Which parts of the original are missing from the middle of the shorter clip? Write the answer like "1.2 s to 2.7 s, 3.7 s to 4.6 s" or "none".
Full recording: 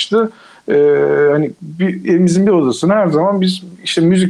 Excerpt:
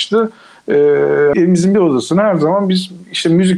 1.3 s to 2.1 s